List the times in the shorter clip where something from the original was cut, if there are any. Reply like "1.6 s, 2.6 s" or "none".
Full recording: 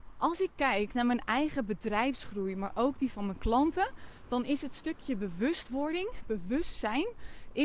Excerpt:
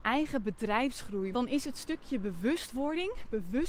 1.3 s